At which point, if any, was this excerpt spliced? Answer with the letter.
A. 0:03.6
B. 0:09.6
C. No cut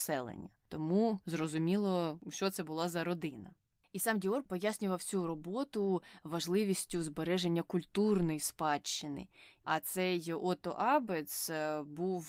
B